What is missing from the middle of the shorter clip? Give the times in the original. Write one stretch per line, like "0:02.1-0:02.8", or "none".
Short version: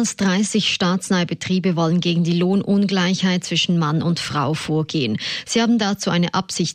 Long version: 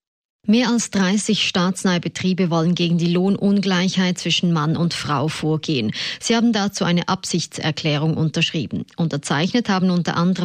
none